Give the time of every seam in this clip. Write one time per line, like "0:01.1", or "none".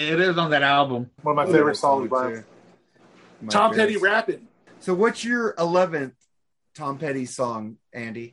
0:01.2
0:04.7

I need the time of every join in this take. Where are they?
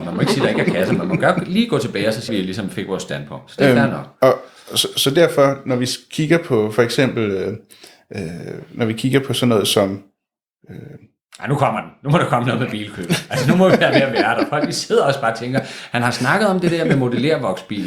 0:02.3

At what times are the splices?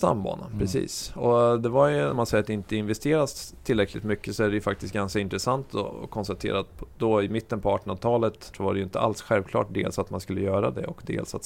0:02.1
0:08.5

